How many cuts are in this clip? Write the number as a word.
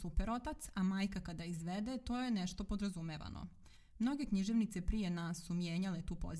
one